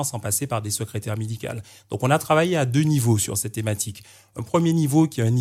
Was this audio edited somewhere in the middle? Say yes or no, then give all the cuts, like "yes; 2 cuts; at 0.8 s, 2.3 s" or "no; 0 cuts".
no; 0 cuts